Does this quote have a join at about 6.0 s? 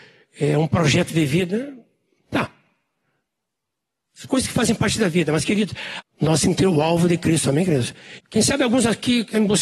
yes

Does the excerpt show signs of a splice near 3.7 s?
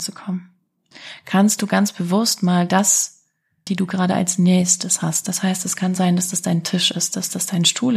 yes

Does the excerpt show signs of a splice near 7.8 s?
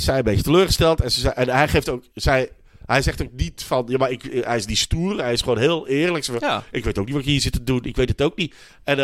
no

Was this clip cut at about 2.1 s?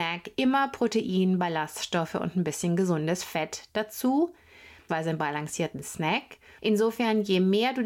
no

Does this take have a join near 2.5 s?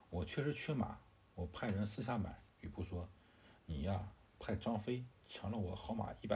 yes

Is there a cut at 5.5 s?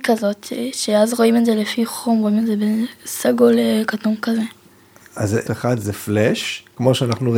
yes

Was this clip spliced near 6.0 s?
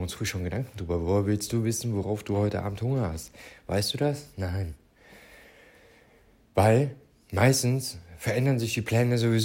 no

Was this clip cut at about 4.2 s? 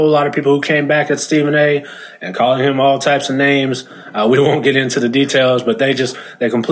no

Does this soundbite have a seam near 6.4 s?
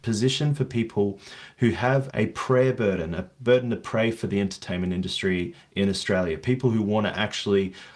no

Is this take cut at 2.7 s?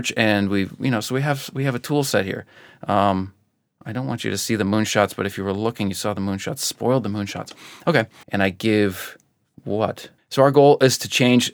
no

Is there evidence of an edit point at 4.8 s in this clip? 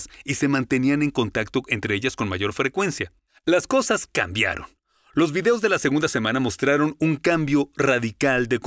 no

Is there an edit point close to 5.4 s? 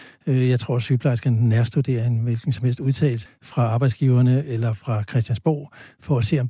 no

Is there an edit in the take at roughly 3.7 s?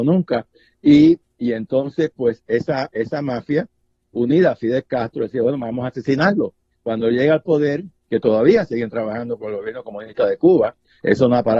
no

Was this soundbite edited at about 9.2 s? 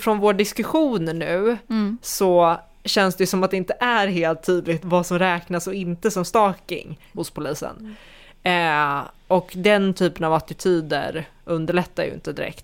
no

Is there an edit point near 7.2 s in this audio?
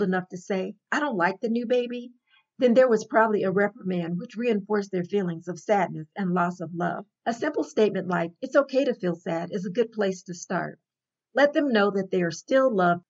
yes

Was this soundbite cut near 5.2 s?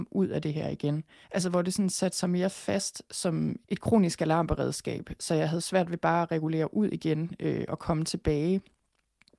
no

